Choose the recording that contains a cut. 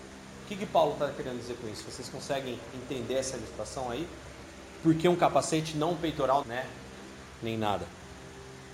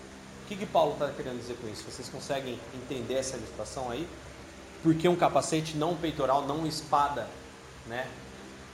first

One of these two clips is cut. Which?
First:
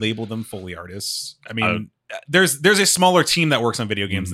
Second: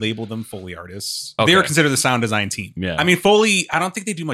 second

